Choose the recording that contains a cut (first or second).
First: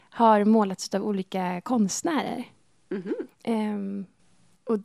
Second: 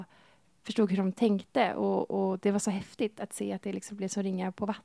first